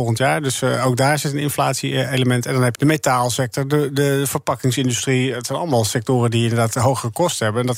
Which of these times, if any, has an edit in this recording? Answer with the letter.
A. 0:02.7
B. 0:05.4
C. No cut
A